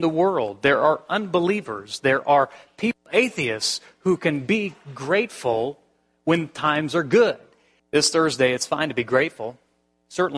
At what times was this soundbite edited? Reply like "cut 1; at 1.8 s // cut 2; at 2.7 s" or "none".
cut 1; at 7.8 s